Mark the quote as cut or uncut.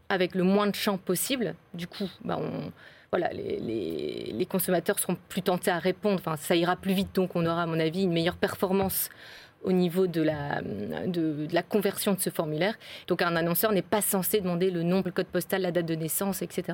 cut